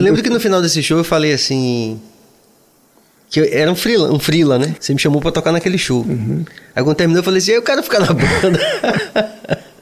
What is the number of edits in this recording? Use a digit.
1